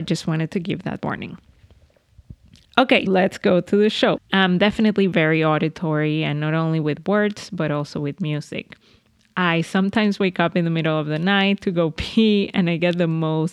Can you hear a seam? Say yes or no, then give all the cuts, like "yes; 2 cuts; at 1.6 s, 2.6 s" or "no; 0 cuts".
yes; 2 cuts; at 3.1 s, 4.2 s